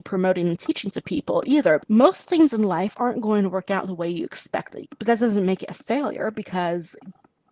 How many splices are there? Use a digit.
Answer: 2